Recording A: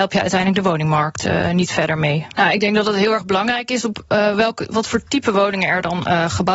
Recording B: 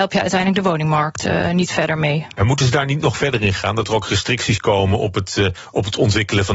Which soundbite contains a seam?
A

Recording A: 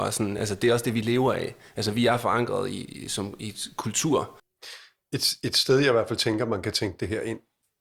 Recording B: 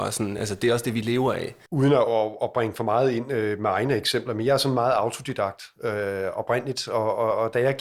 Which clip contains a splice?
B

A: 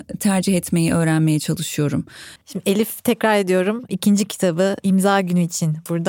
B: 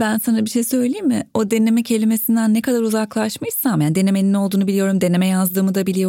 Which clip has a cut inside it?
A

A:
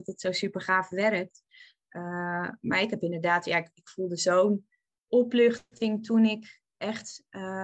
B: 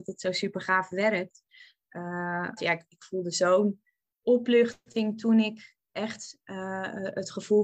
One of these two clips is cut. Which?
B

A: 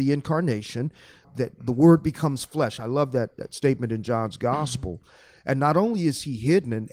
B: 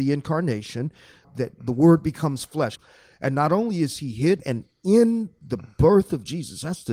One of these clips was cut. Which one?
B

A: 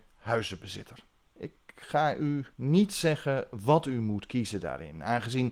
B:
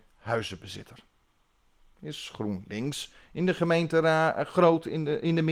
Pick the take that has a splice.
A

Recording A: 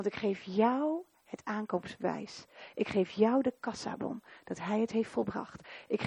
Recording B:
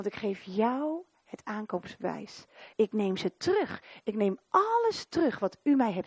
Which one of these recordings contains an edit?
B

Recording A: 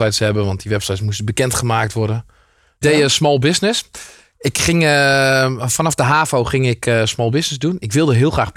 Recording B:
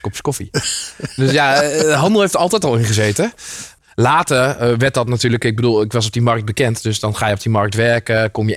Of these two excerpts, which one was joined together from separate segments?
A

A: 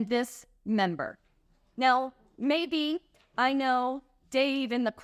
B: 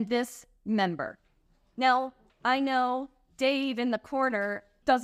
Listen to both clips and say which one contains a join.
B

